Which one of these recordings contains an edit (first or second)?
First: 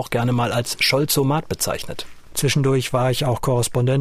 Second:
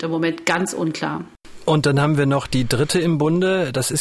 first